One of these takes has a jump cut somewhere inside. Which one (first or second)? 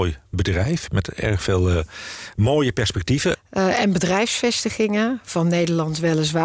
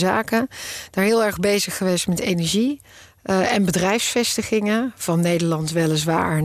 first